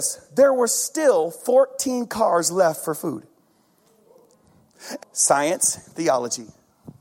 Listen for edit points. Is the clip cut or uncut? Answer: cut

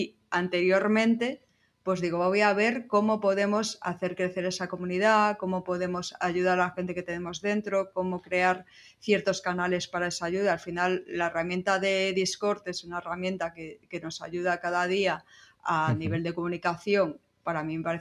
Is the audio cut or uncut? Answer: uncut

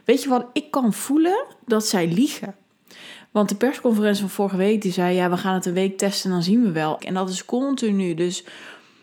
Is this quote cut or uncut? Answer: cut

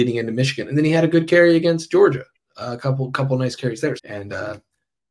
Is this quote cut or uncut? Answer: cut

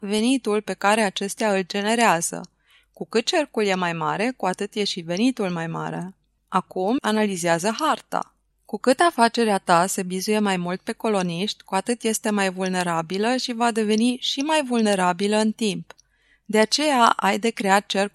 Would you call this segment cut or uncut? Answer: cut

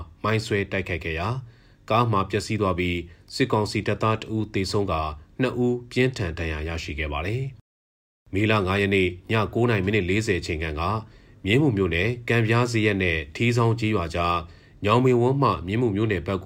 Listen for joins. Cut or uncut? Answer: uncut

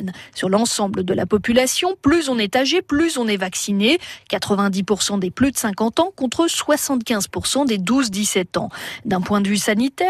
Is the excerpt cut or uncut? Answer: uncut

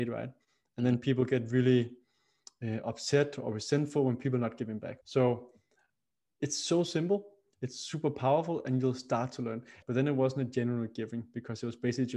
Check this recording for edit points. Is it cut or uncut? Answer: cut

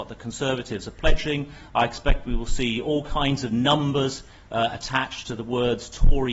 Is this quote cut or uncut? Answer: uncut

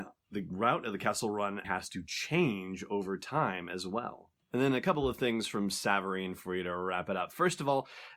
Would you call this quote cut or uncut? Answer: cut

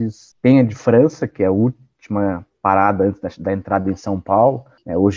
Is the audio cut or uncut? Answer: uncut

